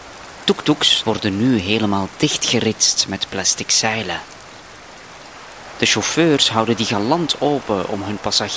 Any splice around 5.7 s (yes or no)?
no